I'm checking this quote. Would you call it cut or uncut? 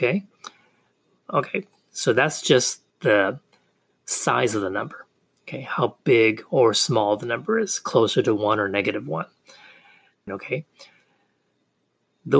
cut